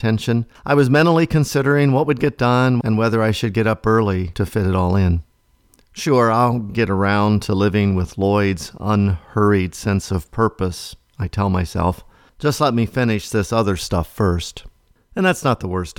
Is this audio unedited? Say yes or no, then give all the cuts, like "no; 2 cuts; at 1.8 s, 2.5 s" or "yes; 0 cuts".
no; 1 cut; at 2.8 s